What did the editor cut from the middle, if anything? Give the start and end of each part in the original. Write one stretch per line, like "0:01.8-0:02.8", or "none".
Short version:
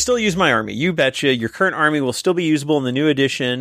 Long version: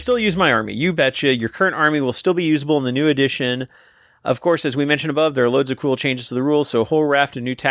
none

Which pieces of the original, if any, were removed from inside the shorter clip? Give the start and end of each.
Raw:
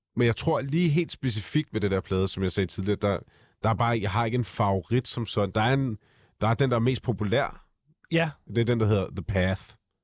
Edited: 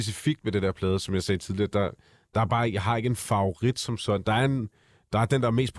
none

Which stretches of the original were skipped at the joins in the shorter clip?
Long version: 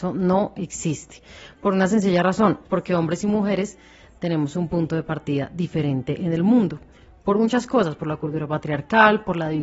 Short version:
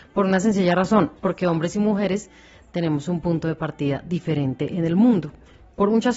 none

